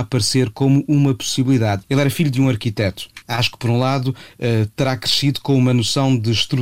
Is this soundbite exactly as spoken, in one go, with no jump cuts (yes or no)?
no